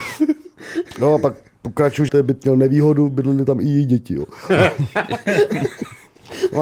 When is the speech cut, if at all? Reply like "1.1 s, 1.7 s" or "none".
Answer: 2.1 s